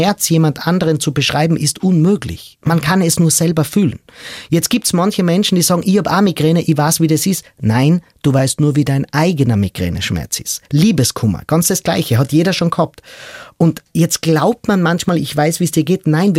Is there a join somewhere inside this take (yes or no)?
no